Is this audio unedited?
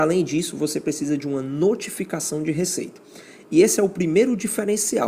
yes; 0 cuts

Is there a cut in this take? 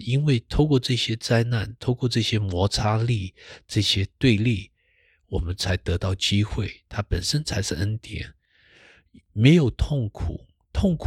no; 0 cuts

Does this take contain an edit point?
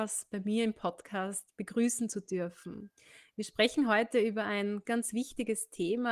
yes; 1 cut; at 4.8 s

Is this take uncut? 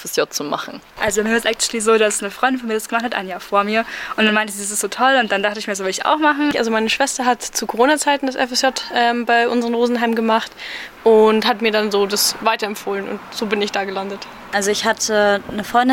no; 1 cut; at 6.5 s

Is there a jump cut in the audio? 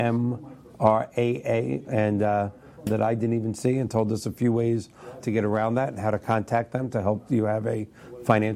yes; 2 cuts; at 2.9 s, 5.2 s

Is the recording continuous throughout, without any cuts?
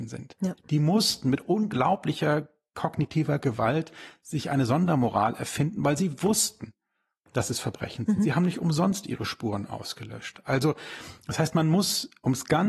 yes; 0 cuts

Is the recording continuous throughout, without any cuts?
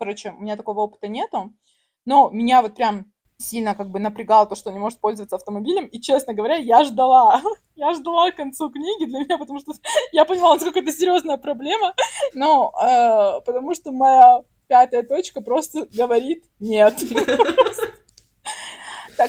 no; 2 cuts; at 3.4 s, 12.3 s

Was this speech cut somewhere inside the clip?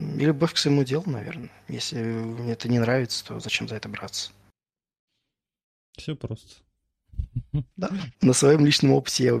yes; 1 cut; at 8.1 s

